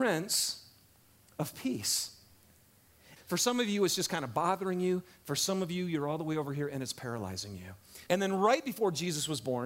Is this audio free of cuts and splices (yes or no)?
no